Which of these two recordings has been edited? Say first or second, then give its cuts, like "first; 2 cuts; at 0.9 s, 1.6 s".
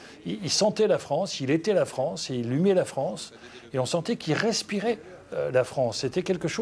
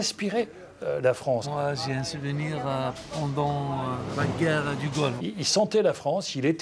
second; 2 cuts; at 1.4 s, 5.2 s